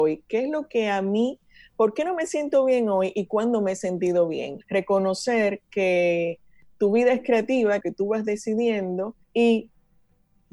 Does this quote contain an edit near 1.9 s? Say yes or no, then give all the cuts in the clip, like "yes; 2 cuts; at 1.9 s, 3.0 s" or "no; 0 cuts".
no; 3 cuts; at 4.6 s, 7.8 s, 9.2 s